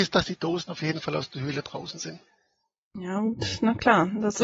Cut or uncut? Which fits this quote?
uncut